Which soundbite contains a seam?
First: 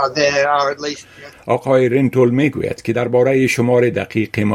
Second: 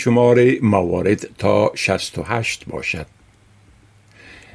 first; 1 cut; at 1.3 s

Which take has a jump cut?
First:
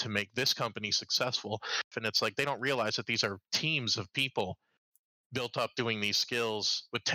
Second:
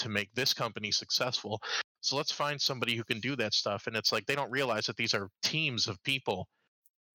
first; 1 cut; at 1.9 s

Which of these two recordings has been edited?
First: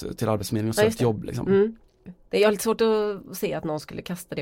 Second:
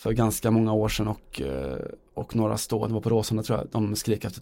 first; 1 cut; at 2.1 s

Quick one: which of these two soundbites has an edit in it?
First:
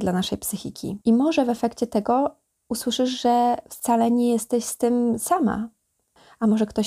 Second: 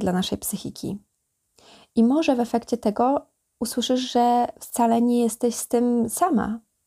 first; 1 cut; at 1.0 s

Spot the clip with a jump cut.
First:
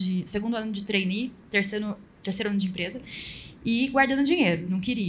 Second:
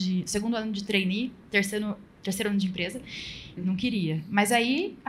second; 1 cut; at 3.6 s

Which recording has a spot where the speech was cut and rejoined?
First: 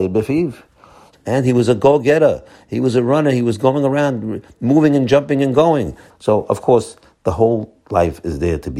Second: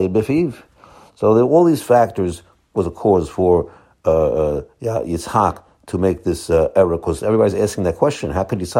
first; 2 cuts; at 1.1 s, 6.1 s

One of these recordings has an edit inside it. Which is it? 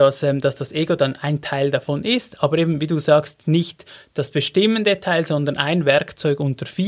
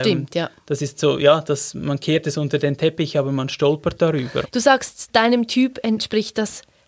second; 1 cut; at 4.4 s

